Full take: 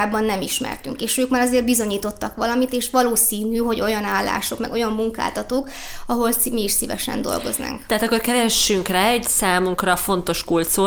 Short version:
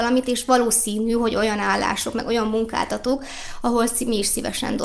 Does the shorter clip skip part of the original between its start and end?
no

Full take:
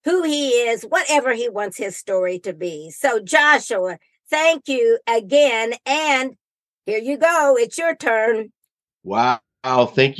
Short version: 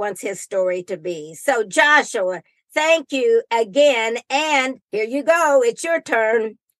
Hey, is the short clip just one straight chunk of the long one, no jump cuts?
no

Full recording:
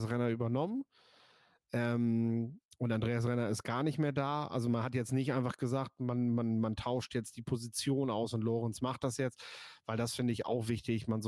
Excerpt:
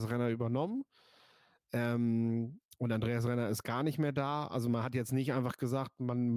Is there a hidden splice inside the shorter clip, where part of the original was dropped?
no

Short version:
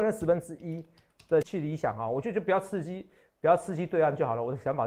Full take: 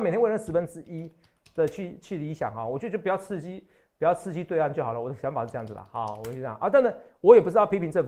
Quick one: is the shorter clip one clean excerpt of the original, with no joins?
no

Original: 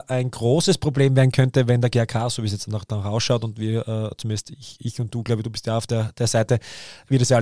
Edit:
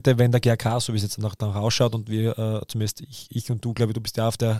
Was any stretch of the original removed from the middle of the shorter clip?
no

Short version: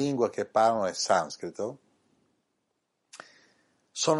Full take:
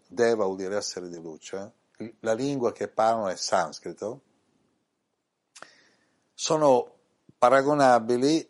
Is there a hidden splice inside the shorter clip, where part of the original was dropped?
no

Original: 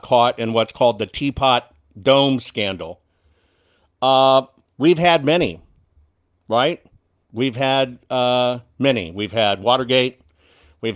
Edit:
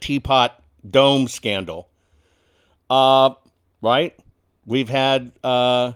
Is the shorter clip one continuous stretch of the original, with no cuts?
no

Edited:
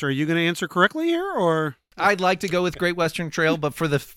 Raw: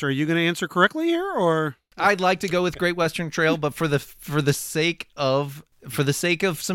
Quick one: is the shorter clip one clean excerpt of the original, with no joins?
yes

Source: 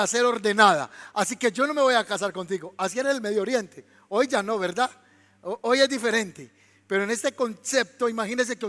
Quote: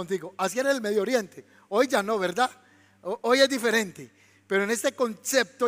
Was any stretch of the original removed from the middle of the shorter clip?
no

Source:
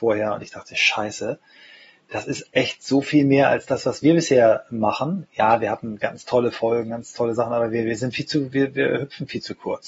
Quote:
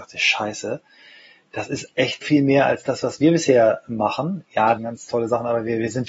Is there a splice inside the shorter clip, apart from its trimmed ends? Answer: yes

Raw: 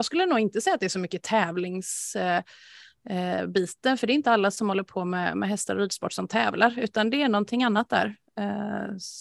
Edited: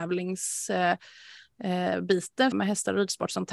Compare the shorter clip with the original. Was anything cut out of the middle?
yes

